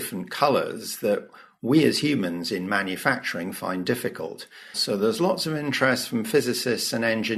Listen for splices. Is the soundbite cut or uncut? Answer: cut